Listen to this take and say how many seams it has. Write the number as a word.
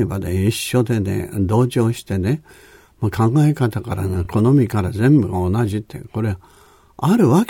zero